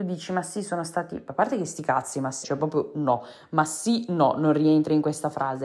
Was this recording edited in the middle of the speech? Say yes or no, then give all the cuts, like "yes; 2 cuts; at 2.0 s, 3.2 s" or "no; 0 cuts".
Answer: yes; 1 cut; at 2.4 s